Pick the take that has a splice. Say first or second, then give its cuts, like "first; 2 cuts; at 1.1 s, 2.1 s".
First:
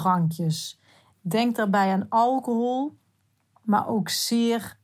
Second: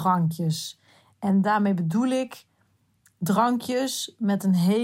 first; 1 cut; at 1.1 s